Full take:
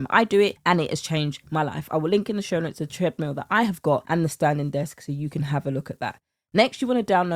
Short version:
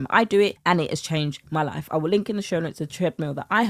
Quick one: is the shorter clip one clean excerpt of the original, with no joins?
yes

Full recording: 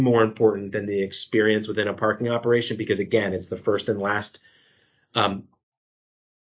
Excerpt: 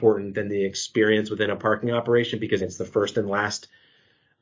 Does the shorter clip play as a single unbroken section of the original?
no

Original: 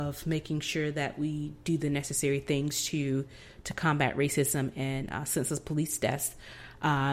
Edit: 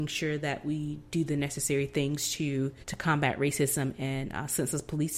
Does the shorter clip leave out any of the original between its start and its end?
yes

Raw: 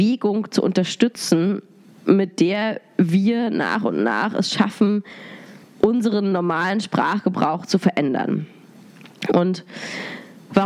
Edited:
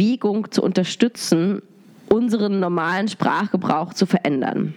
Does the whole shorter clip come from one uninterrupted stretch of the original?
no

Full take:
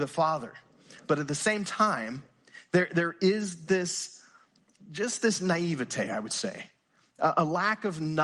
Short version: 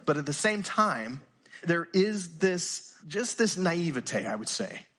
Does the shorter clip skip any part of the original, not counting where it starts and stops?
yes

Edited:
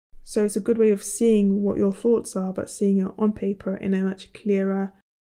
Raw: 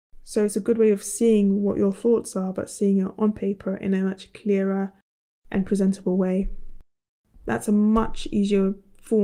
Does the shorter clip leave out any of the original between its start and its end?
no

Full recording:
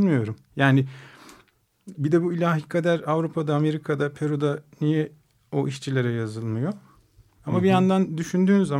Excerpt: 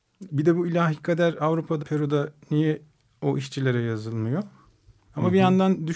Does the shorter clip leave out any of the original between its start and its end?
yes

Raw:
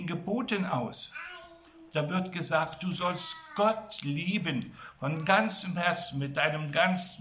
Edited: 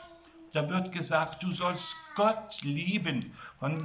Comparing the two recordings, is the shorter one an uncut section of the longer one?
yes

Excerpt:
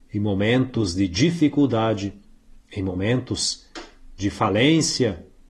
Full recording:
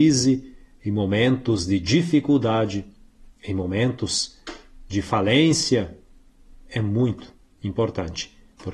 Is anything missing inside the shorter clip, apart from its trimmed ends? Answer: no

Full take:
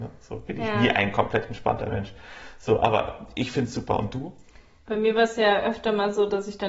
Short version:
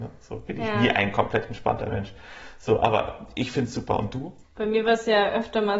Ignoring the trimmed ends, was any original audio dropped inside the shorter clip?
yes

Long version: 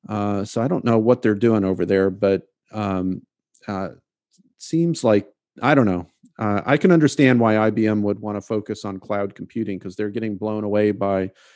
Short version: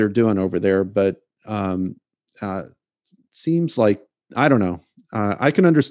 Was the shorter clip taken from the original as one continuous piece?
yes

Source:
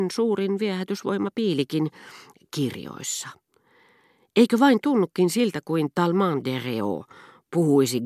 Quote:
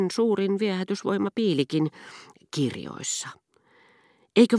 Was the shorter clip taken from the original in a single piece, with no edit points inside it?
yes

